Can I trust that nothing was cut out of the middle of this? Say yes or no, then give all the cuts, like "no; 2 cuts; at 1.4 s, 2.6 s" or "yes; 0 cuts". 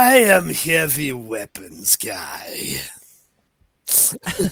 yes; 0 cuts